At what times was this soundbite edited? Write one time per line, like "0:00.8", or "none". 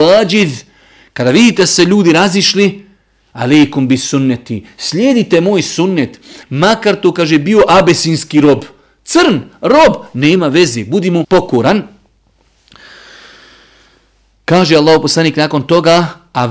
0:06.4
0:11.2

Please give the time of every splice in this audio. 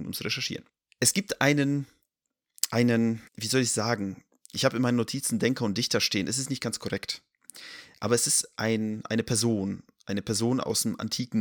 0:03.3

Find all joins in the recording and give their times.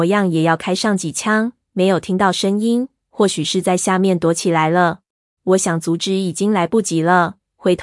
0:05.4

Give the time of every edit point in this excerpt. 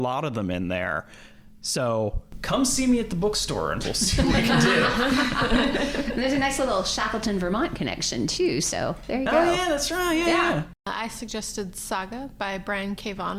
none

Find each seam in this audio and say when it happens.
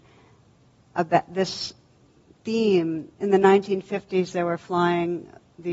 none

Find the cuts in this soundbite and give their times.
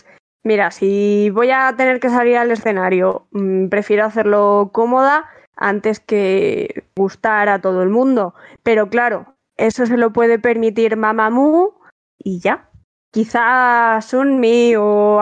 none

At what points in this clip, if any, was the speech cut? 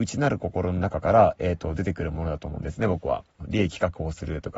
0:03.4

